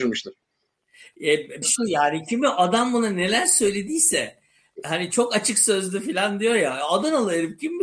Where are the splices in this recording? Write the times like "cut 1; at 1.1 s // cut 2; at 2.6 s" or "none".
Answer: cut 1; at 1.6 s

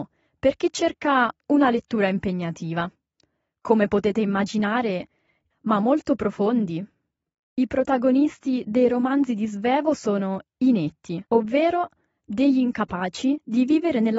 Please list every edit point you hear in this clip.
cut 1; at 5.5 s // cut 2; at 7.5 s // cut 3; at 11.3 s

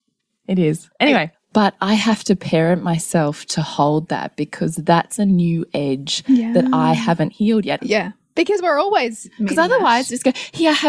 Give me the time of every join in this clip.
cut 1; at 1.3 s // cut 2; at 7.8 s

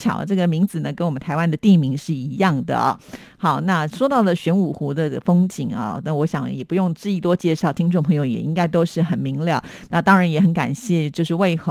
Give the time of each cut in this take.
none

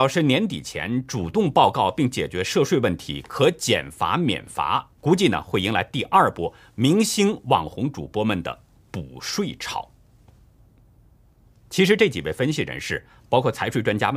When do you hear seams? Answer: cut 1; at 5.0 s

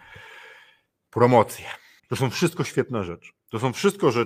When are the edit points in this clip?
cut 1; at 2.0 s

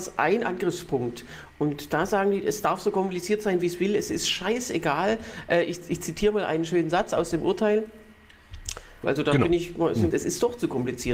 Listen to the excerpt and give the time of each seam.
cut 1; at 9.0 s // cut 2; at 10.1 s

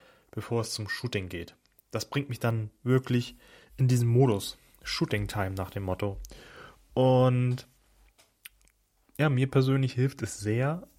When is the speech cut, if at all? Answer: none

